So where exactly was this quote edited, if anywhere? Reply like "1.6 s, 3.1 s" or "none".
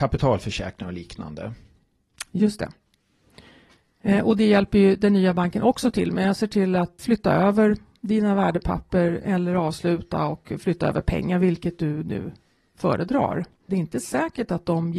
7.0 s, 13.7 s